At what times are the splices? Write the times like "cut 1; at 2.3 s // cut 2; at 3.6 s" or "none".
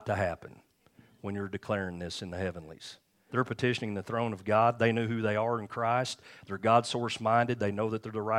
cut 1; at 3.3 s